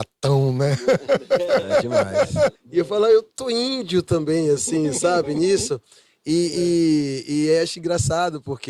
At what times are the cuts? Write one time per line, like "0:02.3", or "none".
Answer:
0:02.5